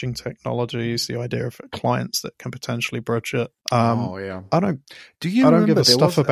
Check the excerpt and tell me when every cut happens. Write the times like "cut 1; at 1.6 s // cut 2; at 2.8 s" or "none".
cut 1; at 3.6 s